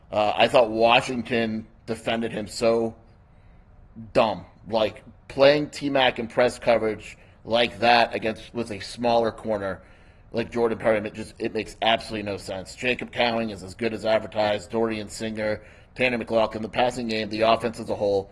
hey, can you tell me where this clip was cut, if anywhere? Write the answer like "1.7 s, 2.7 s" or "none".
none